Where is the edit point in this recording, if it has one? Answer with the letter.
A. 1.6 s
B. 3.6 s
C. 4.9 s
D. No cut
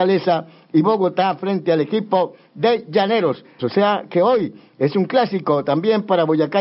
B